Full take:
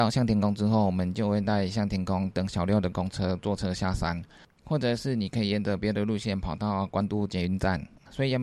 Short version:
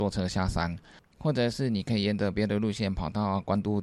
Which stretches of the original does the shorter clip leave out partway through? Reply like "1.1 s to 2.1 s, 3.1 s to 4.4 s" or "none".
none